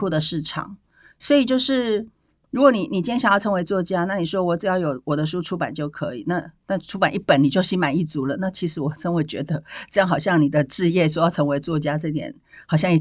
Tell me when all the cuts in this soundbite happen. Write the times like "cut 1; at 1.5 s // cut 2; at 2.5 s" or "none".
none